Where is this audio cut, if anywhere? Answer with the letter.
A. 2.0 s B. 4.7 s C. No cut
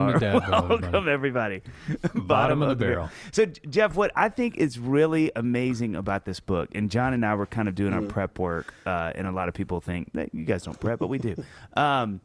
C